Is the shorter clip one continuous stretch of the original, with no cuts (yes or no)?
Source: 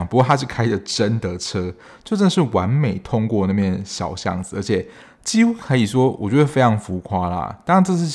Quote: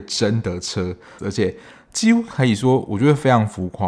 no